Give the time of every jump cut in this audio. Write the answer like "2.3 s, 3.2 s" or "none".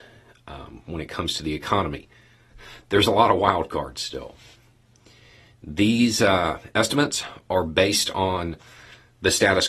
2.5 s

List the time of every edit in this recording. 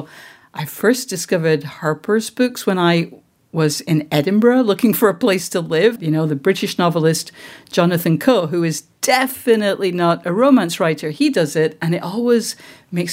6.0 s

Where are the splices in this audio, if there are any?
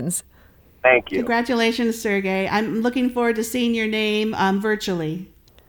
none

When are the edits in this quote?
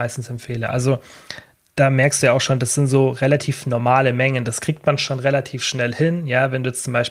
none

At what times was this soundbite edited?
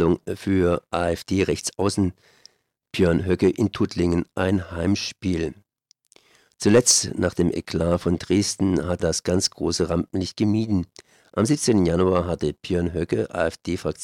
9.0 s

